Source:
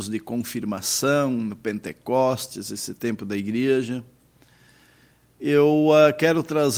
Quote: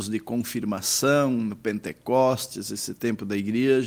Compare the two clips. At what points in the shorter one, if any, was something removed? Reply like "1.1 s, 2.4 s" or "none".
none